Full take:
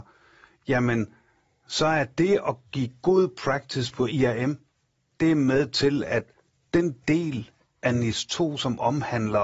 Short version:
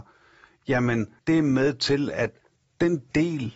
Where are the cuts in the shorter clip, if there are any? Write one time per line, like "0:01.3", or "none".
0:01.2